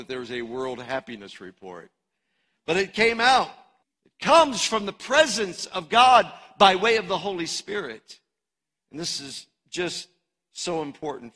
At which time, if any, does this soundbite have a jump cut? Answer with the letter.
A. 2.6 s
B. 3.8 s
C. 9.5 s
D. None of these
B